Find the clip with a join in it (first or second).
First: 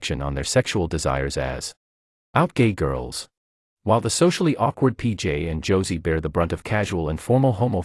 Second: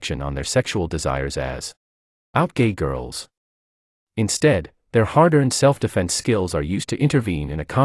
first